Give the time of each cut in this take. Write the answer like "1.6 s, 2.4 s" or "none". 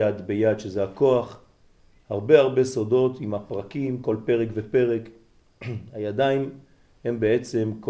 none